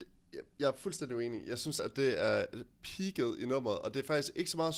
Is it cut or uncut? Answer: uncut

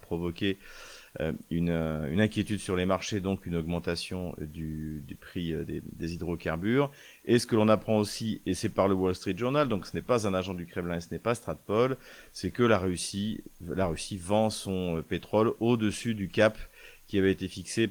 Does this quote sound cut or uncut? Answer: uncut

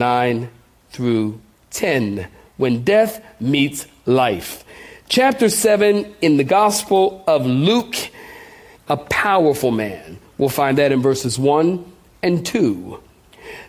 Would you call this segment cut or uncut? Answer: cut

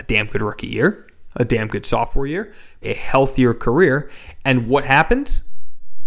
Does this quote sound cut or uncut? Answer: cut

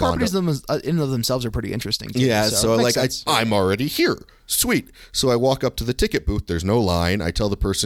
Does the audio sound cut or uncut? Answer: cut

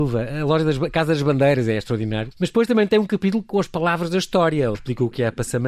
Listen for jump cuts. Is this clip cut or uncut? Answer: cut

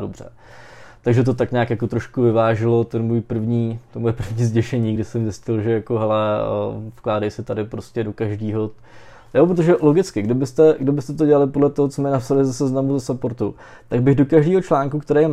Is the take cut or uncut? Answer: uncut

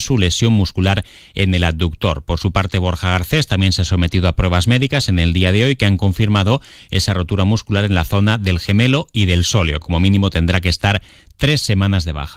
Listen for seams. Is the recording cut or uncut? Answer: uncut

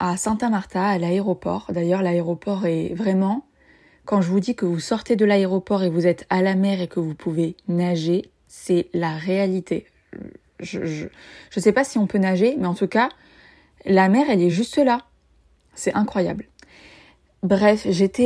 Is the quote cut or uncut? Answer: uncut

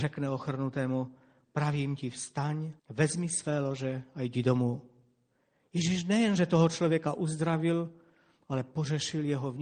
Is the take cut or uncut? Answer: cut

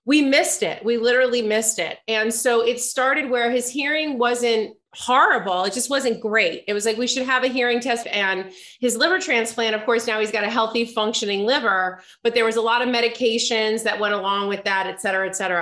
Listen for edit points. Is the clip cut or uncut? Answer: cut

